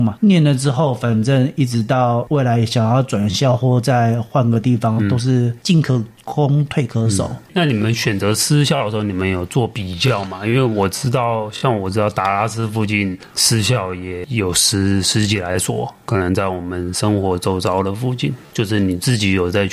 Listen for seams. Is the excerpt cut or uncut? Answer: uncut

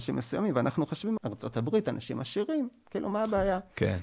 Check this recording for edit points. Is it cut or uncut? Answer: cut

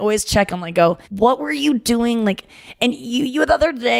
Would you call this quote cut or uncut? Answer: cut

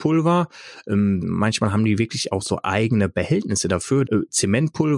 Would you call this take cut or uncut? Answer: cut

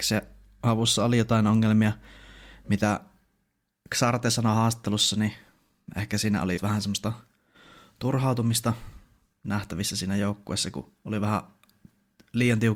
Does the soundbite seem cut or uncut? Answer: cut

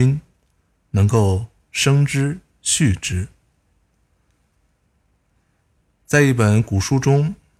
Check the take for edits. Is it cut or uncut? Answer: uncut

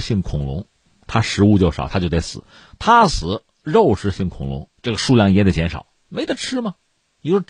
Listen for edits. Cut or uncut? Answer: cut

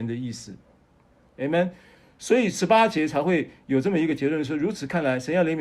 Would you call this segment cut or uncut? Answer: uncut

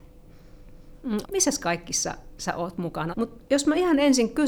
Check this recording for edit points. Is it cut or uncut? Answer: cut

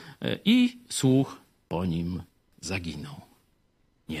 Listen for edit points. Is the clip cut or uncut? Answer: uncut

